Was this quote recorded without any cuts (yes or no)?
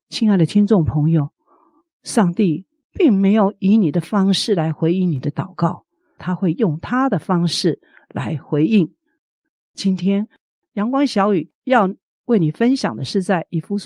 no